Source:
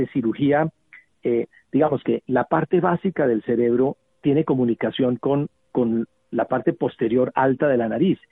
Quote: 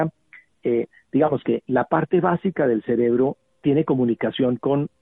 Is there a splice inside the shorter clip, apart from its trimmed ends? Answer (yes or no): no